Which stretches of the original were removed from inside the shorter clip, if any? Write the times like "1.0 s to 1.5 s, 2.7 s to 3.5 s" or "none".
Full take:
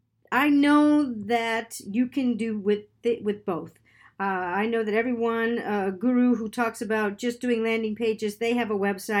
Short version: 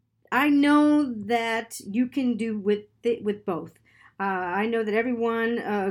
none